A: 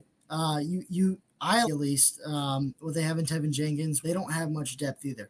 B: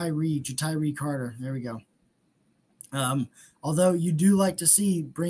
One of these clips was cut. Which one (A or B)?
A